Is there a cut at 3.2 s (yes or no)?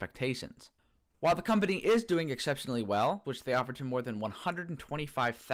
yes